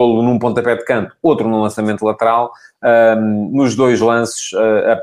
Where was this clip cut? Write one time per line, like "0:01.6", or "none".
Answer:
none